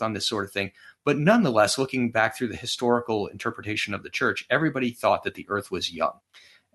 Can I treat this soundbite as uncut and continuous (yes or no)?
yes